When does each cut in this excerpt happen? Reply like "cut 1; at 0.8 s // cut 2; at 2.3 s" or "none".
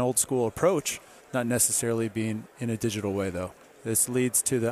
cut 1; at 1.2 s // cut 2; at 3.6 s